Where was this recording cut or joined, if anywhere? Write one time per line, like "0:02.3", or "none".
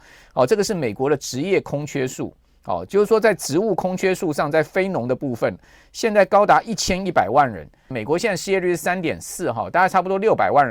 0:07.9